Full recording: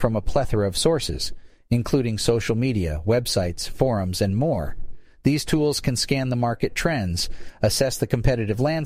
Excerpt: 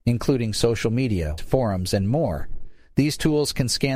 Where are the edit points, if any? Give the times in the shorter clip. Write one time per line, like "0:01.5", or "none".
0:01.4

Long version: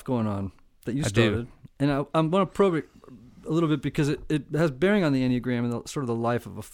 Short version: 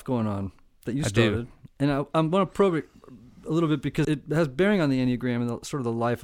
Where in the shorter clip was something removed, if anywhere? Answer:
0:04.0

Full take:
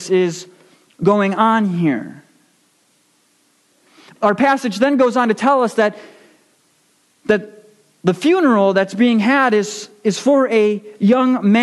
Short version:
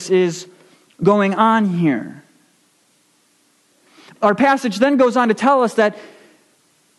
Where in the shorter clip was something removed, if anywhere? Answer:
none

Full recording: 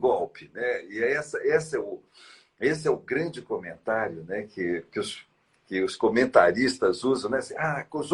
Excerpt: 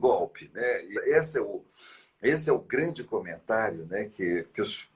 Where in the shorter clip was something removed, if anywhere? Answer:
0:00.9

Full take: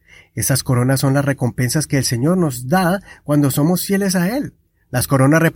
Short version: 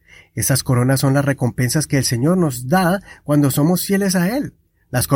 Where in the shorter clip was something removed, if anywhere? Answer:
none

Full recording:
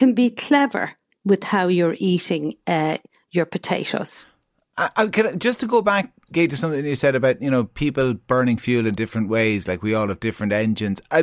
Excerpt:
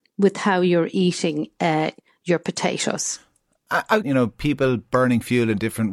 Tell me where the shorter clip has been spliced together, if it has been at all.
0:04.0

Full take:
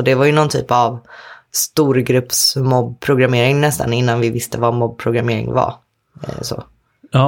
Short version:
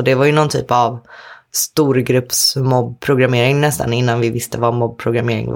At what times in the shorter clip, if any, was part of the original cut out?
none

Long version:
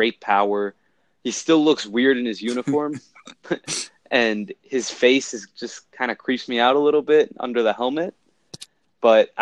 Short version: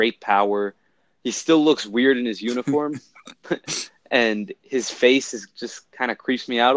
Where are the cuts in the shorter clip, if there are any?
none

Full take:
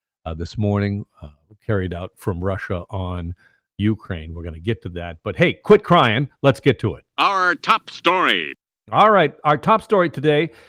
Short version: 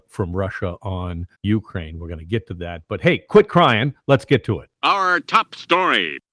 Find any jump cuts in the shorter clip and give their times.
0:01.3

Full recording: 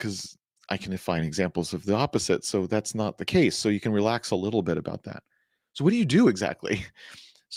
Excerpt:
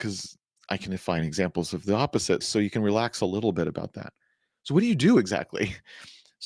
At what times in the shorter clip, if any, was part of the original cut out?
0:02.4

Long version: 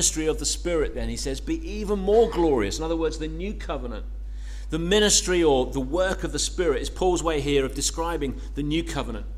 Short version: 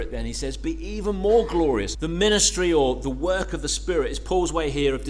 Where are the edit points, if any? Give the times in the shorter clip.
0:01.9

